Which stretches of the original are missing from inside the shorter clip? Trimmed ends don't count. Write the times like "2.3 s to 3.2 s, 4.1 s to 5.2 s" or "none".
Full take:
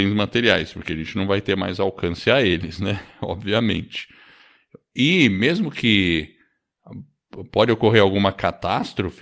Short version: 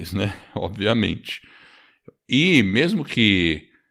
none